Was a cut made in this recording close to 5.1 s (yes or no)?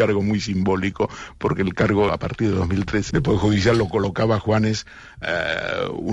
no